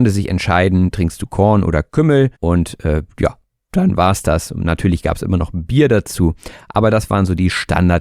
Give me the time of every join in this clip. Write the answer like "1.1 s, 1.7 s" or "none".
2.3 s